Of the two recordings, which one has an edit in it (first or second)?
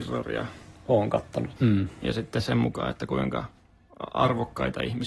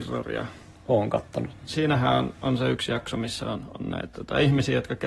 first